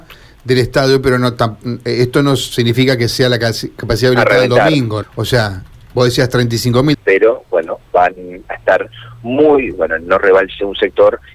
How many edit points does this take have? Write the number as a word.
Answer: three